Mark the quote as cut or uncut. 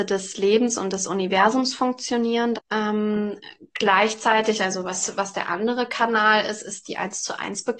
cut